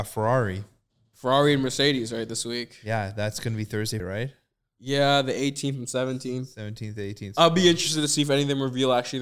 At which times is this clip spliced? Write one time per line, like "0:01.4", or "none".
0:04.0